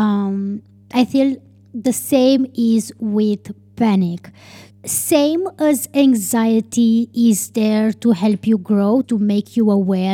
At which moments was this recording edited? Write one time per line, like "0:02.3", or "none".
0:04.7
0:09.0